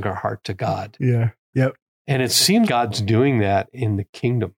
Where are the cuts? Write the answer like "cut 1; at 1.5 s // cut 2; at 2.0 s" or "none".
cut 1; at 1.5 s // cut 2; at 2.7 s